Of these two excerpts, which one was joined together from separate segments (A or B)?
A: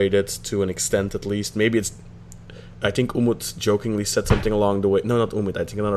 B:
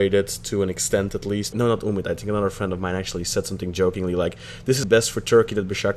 B